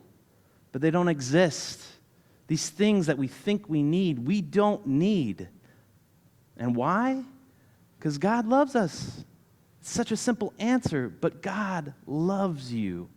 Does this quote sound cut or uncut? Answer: uncut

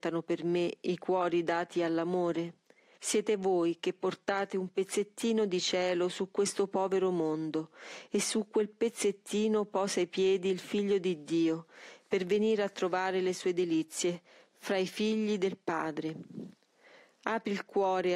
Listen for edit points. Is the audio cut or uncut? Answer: cut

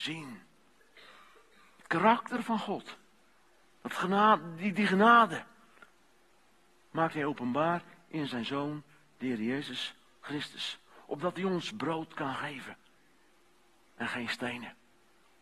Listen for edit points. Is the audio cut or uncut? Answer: uncut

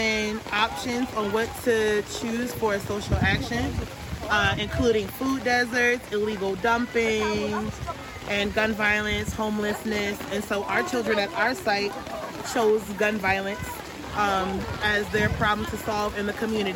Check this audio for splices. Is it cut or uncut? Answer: uncut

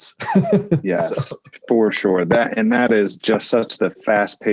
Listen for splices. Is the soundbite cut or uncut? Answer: uncut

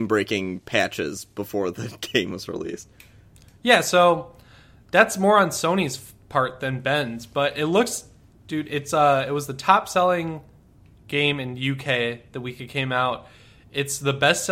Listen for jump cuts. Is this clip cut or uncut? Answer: uncut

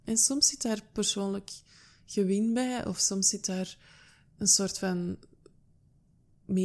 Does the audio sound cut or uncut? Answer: uncut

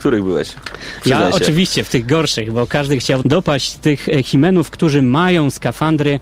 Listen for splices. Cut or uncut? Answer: cut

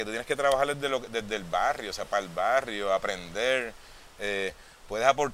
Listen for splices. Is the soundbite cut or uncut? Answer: uncut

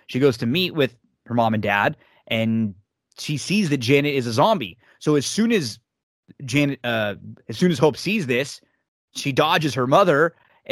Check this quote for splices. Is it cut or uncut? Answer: uncut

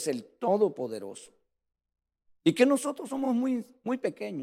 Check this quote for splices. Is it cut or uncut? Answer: uncut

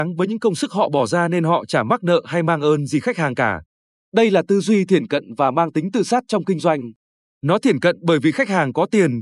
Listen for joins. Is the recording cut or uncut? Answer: uncut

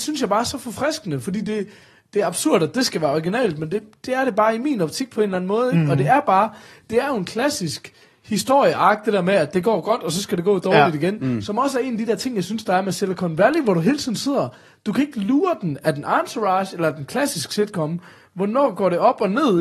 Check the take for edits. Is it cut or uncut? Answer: uncut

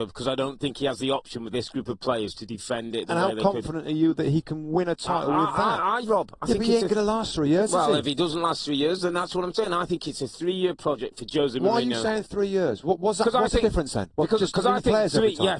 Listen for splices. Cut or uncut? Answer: cut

